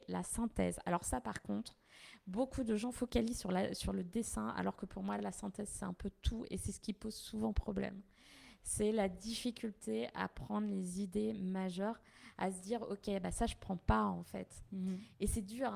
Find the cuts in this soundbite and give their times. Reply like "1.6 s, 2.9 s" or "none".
none